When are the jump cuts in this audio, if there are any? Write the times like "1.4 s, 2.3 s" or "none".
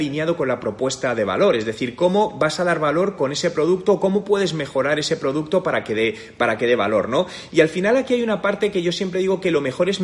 none